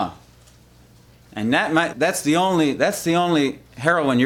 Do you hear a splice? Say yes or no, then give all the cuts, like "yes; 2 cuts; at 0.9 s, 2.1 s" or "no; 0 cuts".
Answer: yes; 1 cut; at 1.9 s